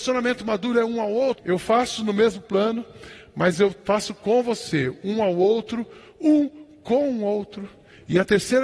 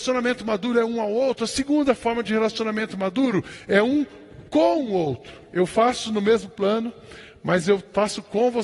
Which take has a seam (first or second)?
first